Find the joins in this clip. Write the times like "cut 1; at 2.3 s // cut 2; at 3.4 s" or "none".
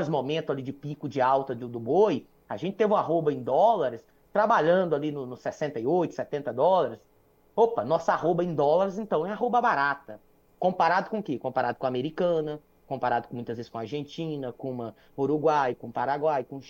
none